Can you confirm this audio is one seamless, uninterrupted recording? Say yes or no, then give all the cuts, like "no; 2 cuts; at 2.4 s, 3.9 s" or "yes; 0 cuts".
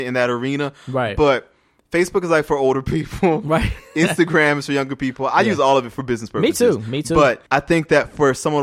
no; 1 cut; at 7.5 s